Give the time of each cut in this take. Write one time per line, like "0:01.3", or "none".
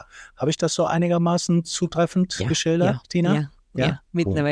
none